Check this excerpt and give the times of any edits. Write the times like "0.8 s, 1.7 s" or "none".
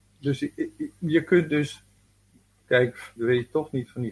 3.2 s